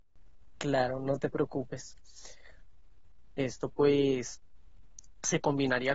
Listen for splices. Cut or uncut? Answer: cut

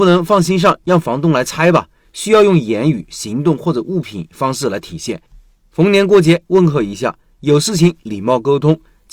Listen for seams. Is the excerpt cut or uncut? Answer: uncut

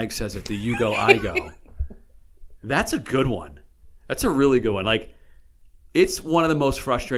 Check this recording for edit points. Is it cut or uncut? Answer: uncut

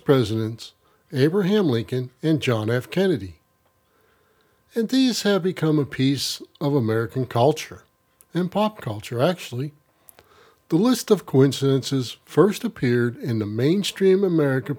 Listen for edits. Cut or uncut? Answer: uncut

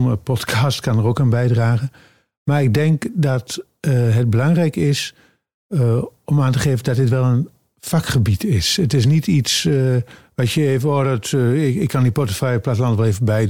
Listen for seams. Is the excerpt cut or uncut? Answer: uncut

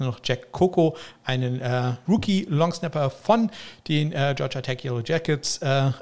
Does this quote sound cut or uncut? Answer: cut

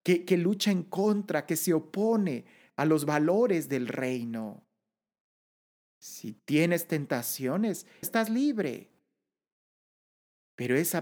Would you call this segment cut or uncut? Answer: cut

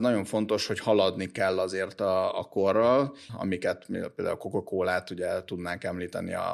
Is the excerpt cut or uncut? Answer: cut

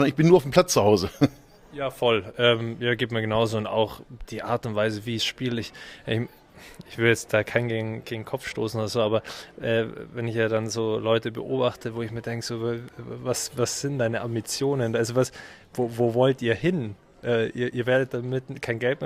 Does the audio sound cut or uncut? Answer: uncut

